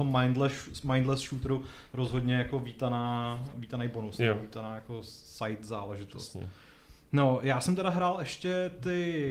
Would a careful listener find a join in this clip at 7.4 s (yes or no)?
no